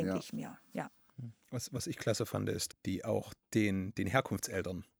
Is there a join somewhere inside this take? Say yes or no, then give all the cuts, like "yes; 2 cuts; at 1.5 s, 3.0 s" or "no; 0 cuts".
yes; 1 cut; at 2.7 s